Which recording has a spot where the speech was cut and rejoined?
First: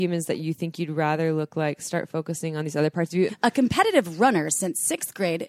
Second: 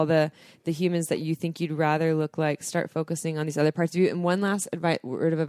first; 1 cut; at 3.3 s

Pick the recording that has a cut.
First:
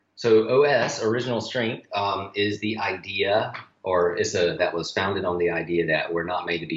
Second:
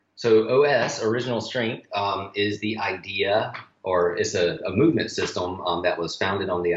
first; 1 cut; at 4.6 s

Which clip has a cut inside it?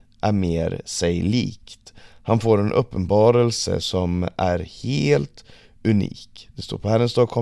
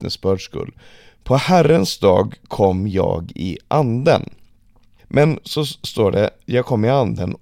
second; 1 cut; at 5.0 s

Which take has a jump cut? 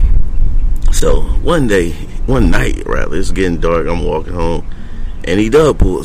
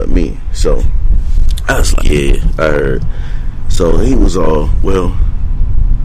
second; 1 cut; at 2.0 s

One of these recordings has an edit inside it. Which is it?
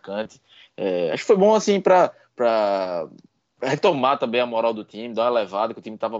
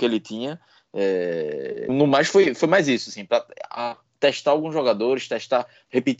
second; 1 cut; at 1.9 s

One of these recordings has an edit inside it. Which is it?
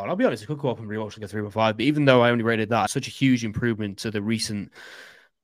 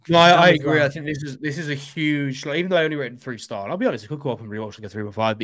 first; 1 cut; at 2.9 s

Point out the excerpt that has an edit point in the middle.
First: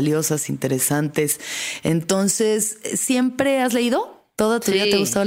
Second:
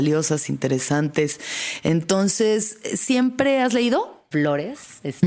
second; 1 cut; at 4.3 s

